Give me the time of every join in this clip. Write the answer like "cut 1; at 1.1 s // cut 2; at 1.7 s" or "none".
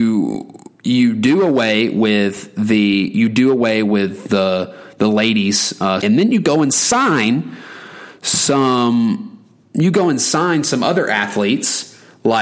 cut 1; at 6.0 s